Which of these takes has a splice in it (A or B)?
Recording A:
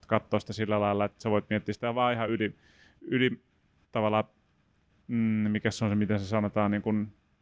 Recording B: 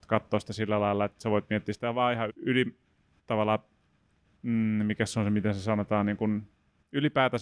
B